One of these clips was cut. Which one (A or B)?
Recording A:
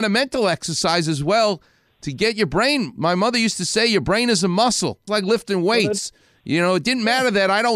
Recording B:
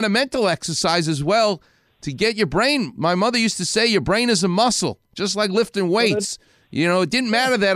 A